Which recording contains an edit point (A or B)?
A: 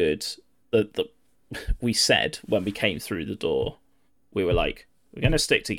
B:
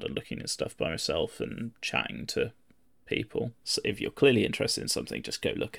B